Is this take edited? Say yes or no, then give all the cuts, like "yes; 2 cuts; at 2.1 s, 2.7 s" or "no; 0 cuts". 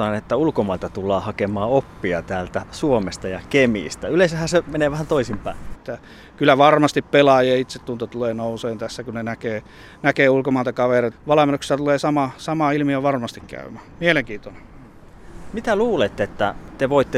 yes; 2 cuts; at 5.7 s, 11.1 s